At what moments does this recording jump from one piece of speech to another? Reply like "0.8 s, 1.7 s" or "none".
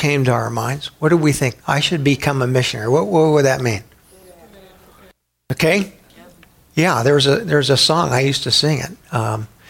1.6 s